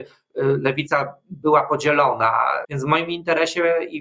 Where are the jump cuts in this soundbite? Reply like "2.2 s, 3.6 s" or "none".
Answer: 2.6 s